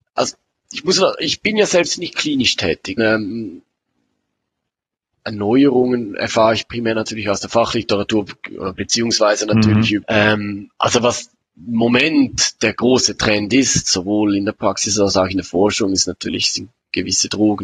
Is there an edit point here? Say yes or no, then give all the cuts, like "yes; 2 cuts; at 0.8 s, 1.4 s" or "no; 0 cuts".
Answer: yes; 2 cuts; at 3.0 s, 10.0 s